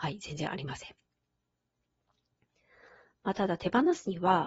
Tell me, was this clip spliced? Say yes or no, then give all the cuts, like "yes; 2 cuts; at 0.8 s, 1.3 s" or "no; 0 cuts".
no; 0 cuts